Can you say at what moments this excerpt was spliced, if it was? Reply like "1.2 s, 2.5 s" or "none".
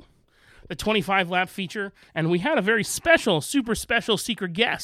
2.1 s